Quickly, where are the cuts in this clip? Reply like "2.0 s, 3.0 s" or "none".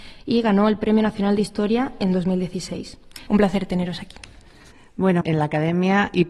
3.3 s, 5.2 s